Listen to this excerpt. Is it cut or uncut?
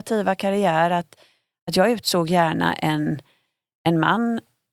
uncut